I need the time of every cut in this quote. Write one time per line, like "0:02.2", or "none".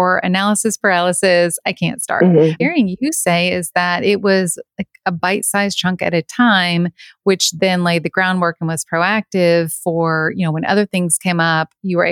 0:02.6